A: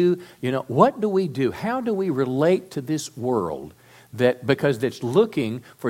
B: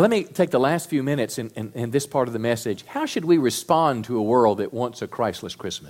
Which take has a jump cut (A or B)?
A